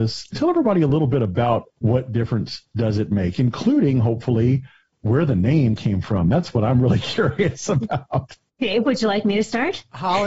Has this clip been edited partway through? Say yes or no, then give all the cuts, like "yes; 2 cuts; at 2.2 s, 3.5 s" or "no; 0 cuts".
no; 0 cuts